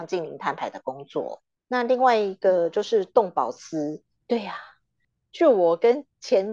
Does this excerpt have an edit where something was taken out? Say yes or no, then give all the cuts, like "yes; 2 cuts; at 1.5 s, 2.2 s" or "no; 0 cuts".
yes; 1 cut; at 4.2 s